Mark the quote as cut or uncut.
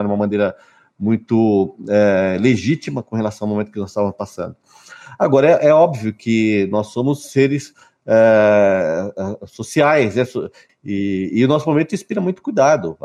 cut